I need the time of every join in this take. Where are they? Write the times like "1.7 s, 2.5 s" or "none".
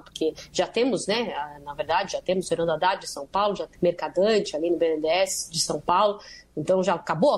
3.7 s